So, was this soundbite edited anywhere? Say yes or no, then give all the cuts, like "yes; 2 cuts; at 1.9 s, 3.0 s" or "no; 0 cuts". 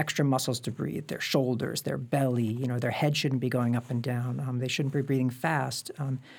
no; 0 cuts